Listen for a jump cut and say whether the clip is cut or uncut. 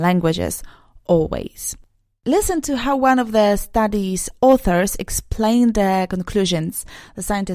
uncut